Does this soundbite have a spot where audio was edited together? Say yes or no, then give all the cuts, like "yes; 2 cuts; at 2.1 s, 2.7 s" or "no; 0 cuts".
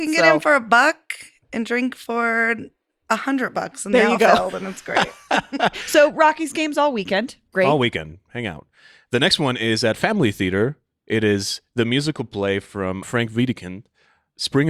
yes; 1 cut; at 13.0 s